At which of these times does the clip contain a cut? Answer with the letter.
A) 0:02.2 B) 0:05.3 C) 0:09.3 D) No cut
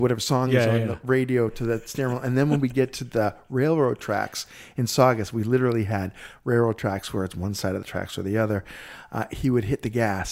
D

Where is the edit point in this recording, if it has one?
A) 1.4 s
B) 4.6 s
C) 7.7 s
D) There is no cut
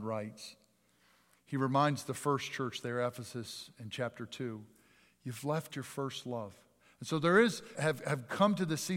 C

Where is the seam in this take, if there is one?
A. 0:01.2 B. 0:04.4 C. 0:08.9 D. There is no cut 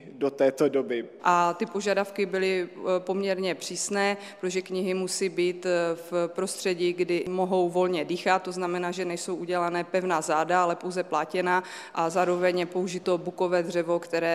A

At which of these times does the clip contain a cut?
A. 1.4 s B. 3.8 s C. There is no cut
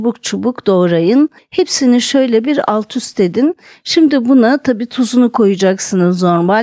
A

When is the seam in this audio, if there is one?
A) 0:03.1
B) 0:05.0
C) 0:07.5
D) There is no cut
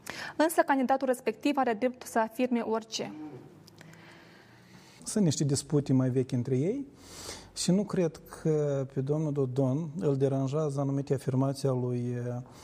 B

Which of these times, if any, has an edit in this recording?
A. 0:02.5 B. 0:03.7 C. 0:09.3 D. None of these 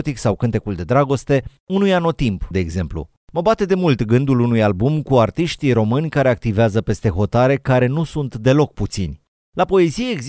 A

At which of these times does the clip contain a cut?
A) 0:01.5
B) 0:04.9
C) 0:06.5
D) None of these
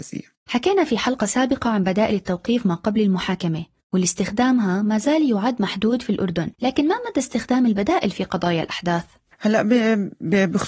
C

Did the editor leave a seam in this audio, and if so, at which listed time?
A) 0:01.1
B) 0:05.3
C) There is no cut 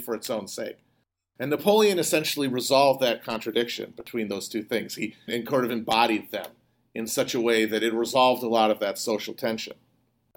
B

